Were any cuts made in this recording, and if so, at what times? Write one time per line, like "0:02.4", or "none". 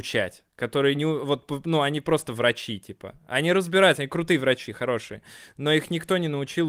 none

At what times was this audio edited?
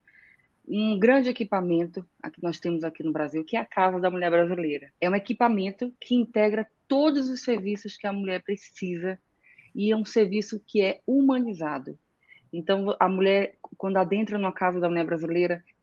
0:05.0

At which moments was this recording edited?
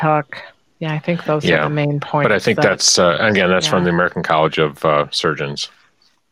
none

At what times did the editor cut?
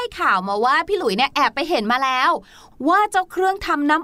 none

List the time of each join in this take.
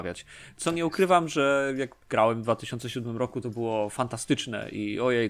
0:02.0

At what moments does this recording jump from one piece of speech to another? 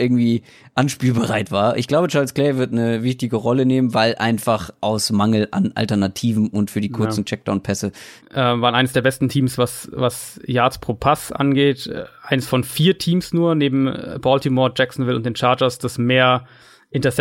0:08.2

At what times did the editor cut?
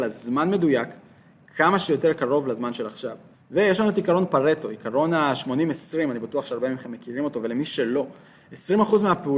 0:03.3

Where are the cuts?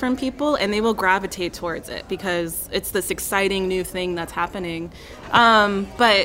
0:05.2

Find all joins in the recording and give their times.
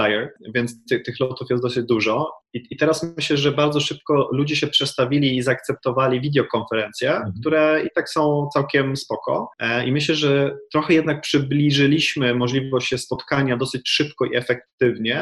none

